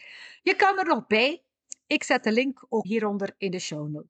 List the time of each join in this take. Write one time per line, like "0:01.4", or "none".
0:02.8